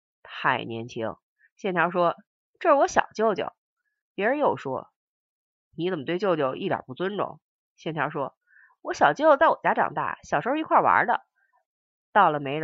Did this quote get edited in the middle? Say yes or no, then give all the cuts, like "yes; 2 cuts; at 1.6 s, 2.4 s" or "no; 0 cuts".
no; 0 cuts